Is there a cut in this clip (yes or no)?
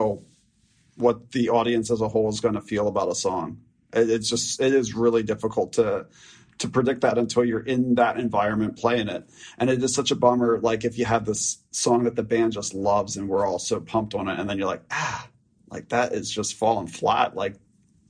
no